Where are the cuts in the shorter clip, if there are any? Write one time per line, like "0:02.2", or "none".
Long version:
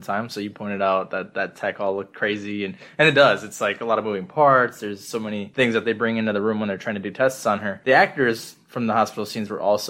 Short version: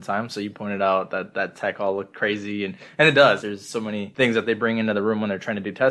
0:03.4